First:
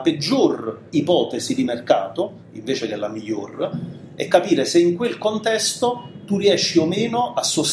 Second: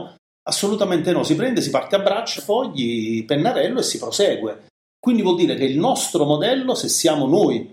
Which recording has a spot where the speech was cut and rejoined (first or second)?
second